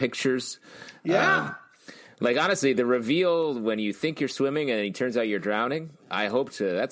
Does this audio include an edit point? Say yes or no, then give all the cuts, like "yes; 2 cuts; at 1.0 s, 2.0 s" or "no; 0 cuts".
no; 0 cuts